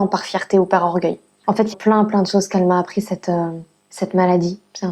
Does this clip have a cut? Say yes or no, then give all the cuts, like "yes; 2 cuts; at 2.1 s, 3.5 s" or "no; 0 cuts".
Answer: yes; 1 cut; at 1.7 s